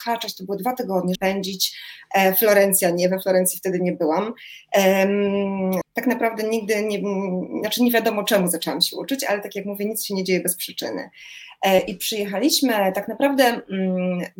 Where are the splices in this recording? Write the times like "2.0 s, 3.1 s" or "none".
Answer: 1.2 s, 5.8 s